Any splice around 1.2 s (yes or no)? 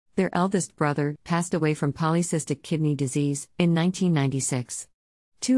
yes